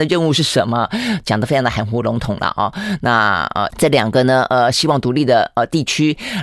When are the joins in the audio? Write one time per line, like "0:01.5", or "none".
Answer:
0:03.7